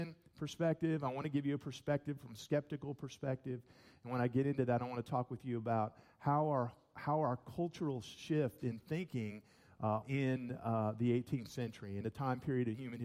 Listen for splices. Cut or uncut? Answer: cut